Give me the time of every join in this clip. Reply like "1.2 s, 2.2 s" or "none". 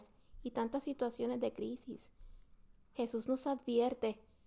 none